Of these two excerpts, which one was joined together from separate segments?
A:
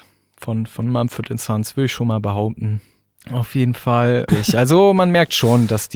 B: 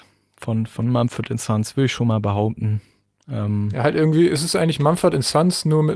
A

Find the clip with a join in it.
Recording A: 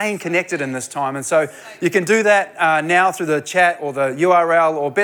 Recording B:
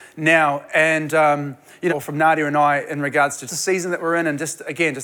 B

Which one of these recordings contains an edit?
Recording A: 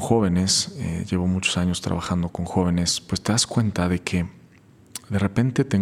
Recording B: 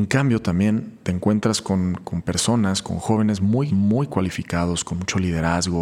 B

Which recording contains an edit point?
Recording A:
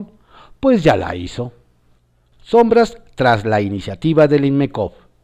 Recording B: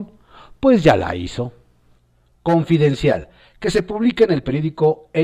A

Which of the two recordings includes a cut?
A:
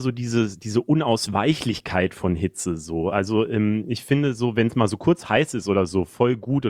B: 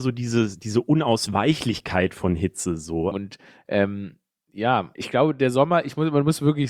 B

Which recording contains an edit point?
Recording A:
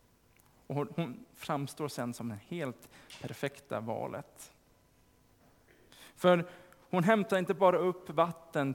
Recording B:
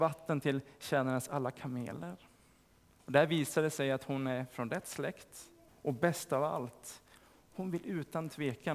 B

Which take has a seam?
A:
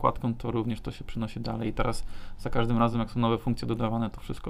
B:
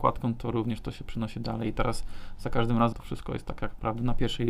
B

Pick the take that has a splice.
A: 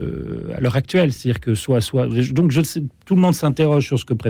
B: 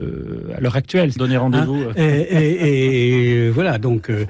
B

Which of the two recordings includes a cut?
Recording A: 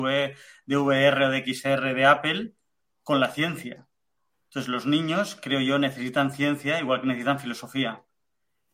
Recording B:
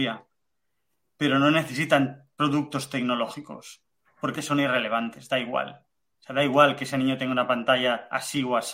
B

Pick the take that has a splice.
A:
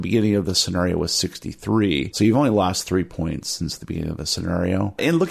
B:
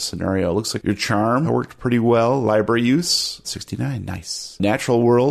B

